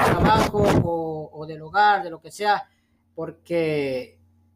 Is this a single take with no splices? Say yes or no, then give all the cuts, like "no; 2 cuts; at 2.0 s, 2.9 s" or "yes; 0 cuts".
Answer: no; 1 cut; at 3.0 s